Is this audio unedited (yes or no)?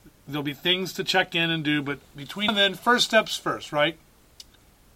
no